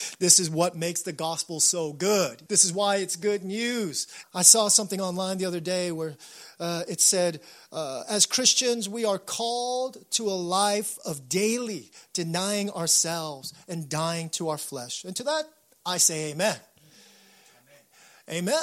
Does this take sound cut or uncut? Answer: cut